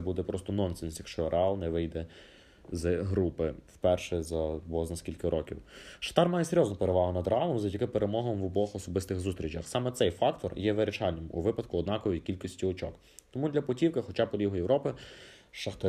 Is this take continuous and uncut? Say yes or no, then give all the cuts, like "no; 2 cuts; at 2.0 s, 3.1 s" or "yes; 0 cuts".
yes; 0 cuts